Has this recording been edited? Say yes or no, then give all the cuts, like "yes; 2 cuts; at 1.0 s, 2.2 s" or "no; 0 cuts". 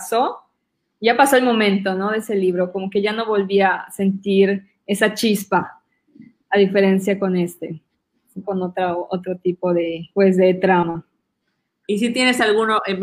yes; 2 cuts; at 8.4 s, 10.1 s